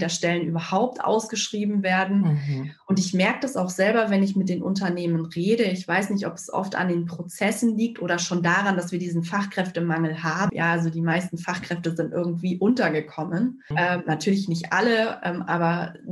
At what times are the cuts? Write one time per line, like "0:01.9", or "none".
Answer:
0:10.5
0:13.7